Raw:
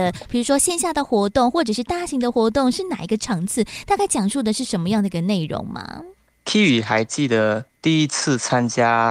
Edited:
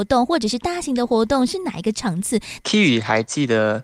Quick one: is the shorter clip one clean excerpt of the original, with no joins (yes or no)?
no